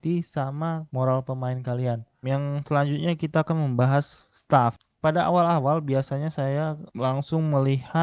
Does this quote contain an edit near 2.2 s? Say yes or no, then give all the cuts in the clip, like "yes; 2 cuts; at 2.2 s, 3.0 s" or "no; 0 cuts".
yes; 1 cut; at 2.2 s